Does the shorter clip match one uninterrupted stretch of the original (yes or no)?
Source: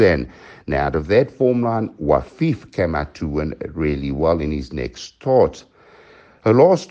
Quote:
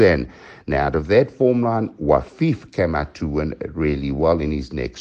yes